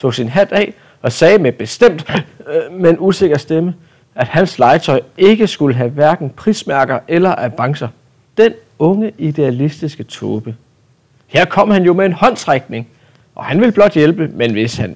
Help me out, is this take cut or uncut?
cut